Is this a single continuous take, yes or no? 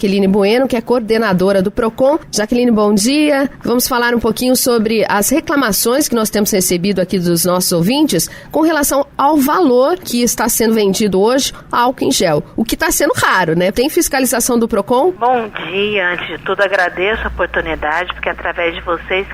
no